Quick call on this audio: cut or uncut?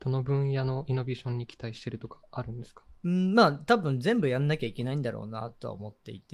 cut